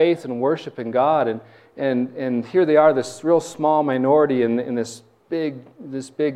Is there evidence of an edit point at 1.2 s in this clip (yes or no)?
no